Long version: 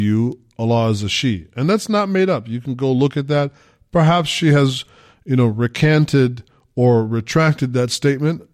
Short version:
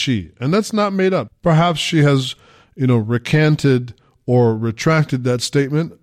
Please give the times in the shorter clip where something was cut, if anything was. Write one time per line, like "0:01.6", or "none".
0:01.3